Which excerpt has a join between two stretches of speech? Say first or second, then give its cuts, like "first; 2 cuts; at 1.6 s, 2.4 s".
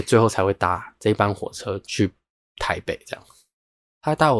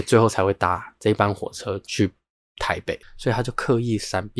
second; 1 cut; at 3.0 s